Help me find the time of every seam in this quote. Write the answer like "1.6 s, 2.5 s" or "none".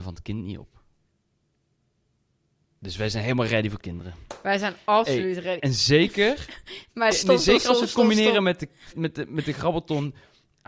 7.1 s, 8.9 s